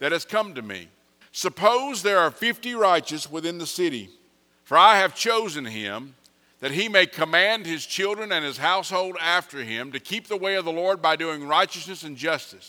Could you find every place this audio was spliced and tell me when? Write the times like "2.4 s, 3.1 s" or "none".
1.2 s, 4.5 s